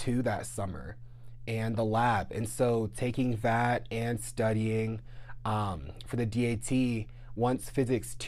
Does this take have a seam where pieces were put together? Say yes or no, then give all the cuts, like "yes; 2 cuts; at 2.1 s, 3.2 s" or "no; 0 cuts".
no; 0 cuts